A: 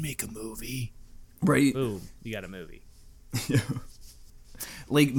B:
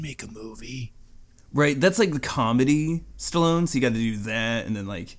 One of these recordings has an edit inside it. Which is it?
B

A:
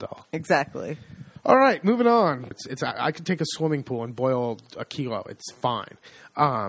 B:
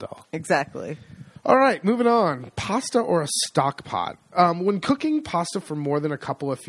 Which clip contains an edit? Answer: A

